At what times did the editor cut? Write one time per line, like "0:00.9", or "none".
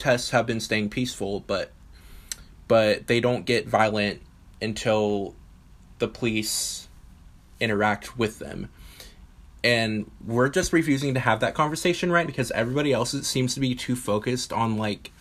0:12.2